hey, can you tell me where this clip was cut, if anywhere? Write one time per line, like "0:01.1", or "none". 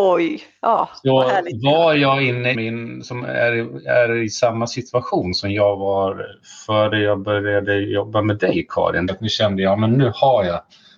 0:02.5
0:09.1